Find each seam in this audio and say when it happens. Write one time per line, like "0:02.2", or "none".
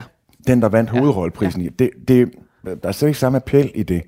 0:02.6